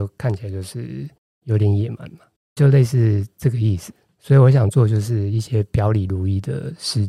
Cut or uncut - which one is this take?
uncut